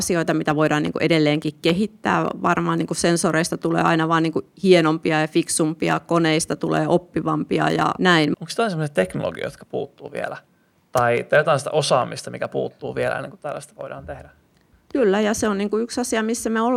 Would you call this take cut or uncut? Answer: cut